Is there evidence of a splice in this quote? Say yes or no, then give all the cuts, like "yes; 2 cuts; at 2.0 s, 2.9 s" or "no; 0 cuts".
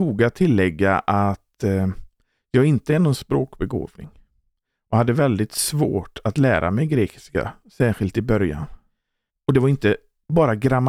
yes; 1 cut; at 9.3 s